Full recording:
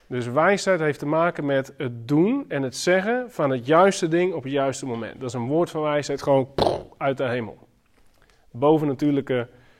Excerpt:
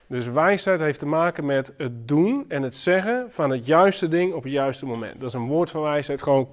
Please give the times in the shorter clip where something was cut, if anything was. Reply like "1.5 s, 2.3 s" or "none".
none